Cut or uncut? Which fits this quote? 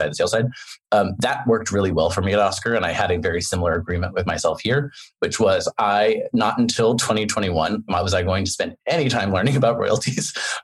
uncut